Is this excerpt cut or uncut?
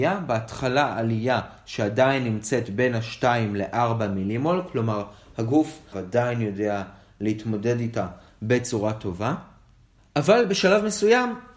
cut